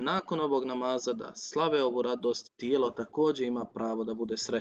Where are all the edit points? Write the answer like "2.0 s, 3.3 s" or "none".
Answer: 2.4 s